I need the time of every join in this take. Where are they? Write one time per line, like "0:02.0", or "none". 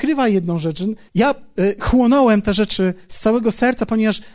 0:01.1